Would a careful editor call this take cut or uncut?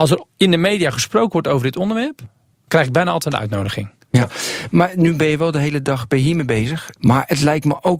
cut